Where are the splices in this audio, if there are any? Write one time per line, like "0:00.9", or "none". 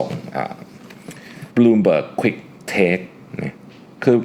0:01.5